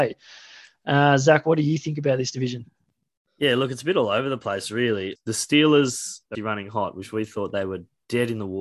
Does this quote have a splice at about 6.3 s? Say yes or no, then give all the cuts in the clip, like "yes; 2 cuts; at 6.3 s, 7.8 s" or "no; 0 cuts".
yes; 2 cuts; at 5.2 s, 6.3 s